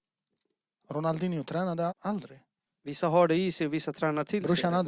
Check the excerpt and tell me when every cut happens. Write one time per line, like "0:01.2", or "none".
0:01.9